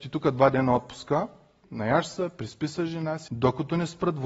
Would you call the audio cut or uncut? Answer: cut